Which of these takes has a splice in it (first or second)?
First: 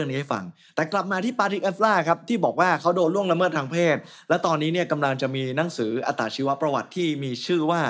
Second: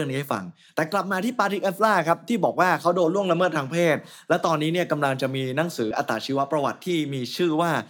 second